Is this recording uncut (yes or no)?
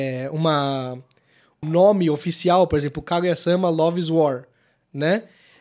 no